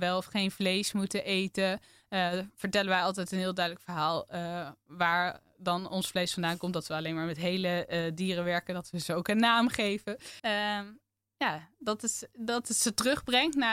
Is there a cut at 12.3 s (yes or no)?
no